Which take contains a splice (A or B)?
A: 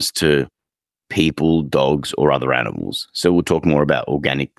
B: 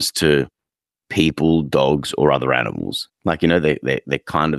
B